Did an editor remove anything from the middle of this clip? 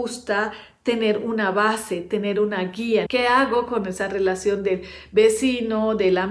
yes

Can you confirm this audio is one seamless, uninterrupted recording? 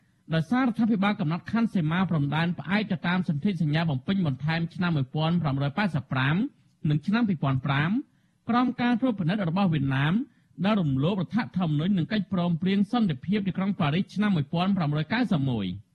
yes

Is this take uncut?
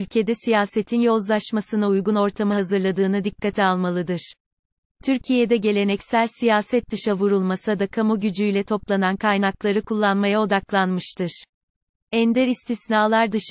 yes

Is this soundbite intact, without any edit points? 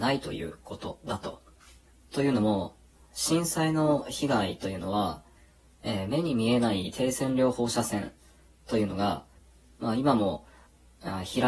yes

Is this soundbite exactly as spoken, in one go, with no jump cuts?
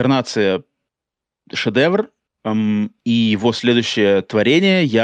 no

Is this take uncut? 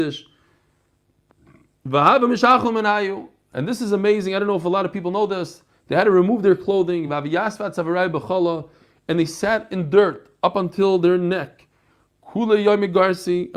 yes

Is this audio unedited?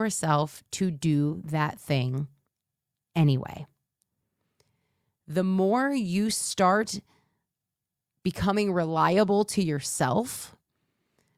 yes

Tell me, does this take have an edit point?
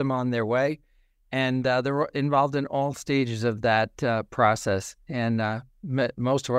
no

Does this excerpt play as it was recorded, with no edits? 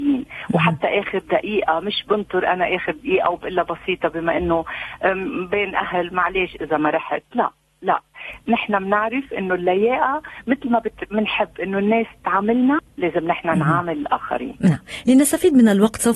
yes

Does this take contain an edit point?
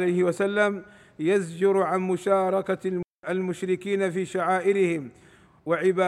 no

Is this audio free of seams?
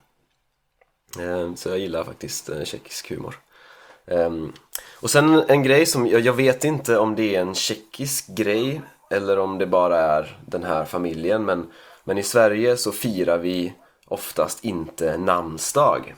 yes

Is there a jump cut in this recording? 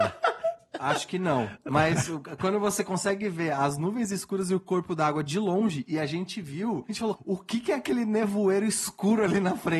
yes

